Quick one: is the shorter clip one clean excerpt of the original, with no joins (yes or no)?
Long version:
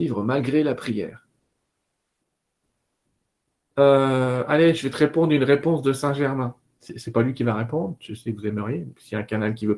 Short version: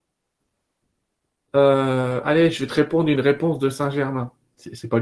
yes